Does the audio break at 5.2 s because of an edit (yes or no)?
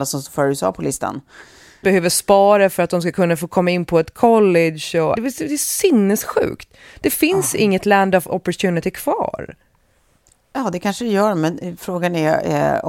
yes